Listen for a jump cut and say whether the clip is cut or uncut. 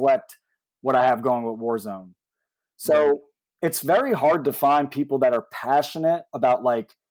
uncut